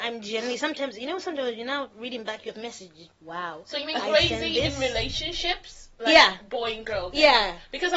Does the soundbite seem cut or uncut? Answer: cut